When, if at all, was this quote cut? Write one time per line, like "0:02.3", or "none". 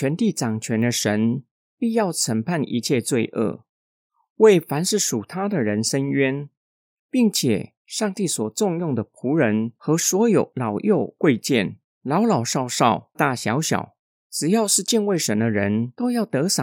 0:13.1